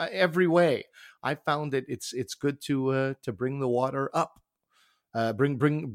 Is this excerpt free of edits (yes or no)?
yes